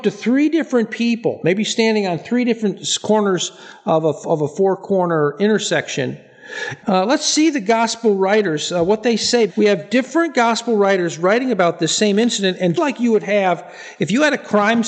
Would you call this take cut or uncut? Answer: cut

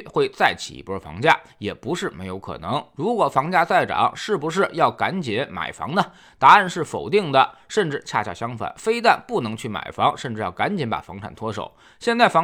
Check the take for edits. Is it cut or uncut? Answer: uncut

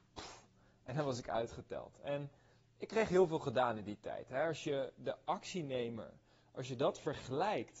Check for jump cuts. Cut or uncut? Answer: uncut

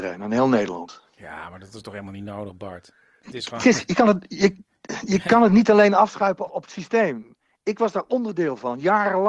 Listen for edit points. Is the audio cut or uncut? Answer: cut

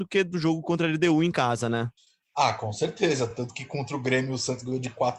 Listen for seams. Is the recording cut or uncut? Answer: uncut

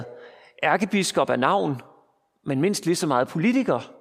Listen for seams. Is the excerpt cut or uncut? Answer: uncut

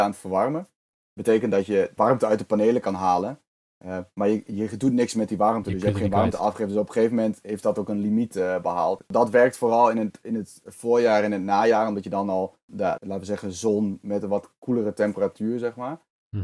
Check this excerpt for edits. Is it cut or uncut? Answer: cut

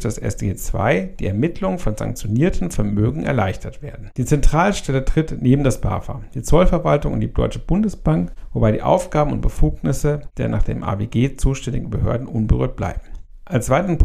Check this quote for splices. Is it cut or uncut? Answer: cut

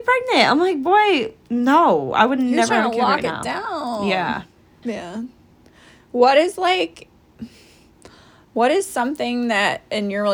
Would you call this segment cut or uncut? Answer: cut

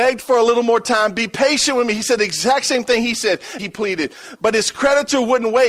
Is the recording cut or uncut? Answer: cut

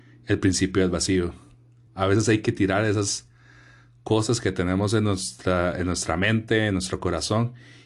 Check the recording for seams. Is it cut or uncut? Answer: uncut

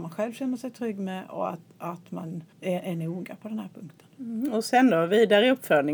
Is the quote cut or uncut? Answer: cut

